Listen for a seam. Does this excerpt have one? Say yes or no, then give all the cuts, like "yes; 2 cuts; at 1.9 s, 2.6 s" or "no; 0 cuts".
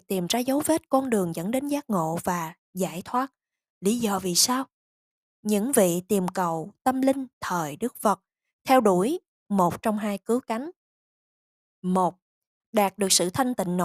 no; 0 cuts